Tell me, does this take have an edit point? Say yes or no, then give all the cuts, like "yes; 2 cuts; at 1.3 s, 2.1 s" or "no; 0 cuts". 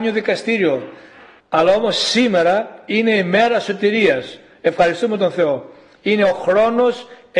yes; 1 cut; at 1.4 s